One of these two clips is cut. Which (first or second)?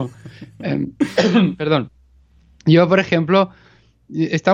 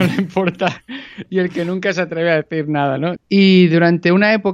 second